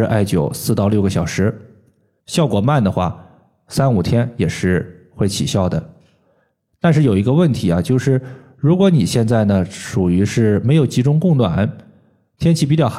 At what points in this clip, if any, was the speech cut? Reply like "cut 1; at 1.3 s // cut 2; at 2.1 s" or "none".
cut 1; at 2.2 s